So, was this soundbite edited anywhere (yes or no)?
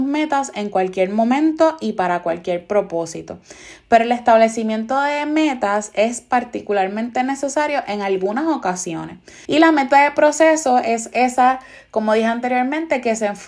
yes